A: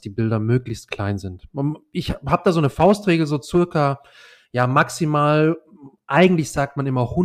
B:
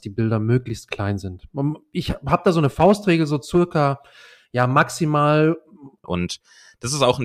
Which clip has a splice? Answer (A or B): B